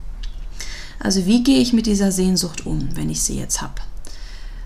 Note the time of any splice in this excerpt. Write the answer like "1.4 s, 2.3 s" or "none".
none